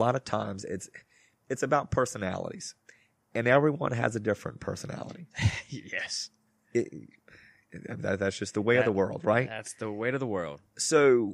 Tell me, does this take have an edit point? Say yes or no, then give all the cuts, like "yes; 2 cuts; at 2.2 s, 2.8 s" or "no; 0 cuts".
no; 0 cuts